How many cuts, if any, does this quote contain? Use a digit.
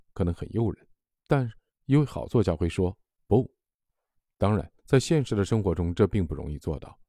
1